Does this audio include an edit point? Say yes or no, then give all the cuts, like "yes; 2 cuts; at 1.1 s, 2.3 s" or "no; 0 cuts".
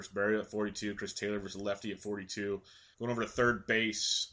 yes; 1 cut; at 2.9 s